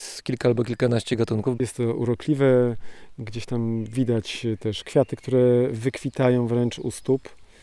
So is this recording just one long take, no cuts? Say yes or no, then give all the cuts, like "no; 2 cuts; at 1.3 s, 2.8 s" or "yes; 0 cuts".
no; 1 cut; at 1.6 s